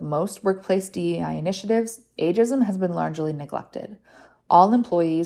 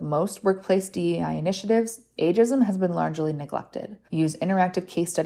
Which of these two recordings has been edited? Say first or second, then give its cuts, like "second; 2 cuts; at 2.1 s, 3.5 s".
second; 1 cut; at 4.1 s